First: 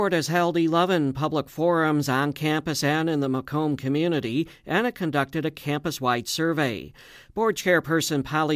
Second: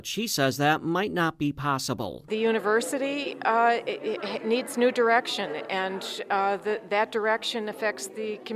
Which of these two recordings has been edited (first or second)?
second